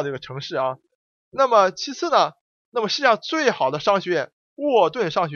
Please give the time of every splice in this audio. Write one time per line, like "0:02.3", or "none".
0:02.6